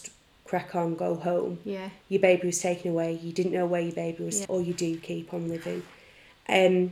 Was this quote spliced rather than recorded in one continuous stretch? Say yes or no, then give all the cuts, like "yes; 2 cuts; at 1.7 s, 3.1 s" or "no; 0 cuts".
yes; 1 cut; at 4.4 s